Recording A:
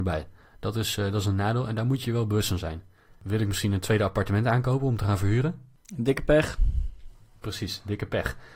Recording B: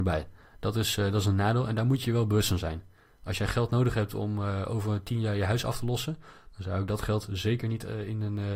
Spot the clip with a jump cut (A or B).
A